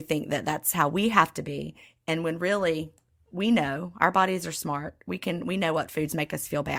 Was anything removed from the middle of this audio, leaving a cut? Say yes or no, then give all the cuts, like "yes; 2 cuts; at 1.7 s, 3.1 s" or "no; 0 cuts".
no; 0 cuts